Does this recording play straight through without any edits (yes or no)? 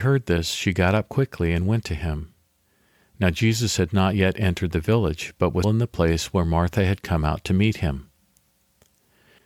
no